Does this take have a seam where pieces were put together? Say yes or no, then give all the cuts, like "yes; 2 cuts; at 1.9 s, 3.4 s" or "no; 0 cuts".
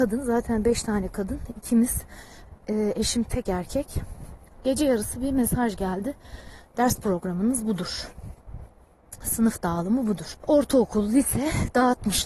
yes; 1 cut; at 10.4 s